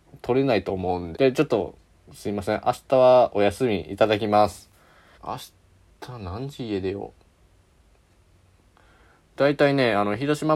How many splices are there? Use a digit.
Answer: 2